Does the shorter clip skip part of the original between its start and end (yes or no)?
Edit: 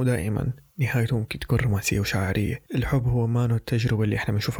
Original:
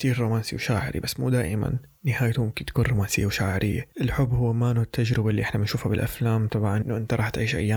no